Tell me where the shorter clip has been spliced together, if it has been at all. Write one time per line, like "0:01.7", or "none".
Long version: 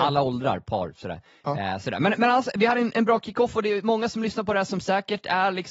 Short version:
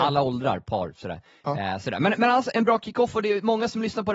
0:02.5